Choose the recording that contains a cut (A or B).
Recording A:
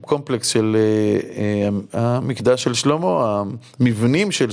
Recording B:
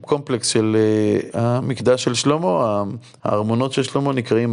B